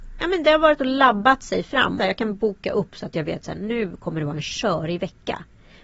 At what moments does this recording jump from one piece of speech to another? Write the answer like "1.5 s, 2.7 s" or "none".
2.0 s